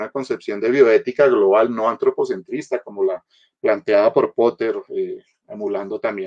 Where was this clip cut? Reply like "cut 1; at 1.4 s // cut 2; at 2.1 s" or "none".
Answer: none